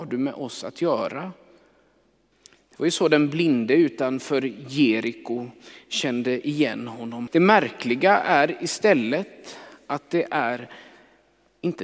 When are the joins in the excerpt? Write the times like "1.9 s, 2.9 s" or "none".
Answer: 2.3 s, 7.3 s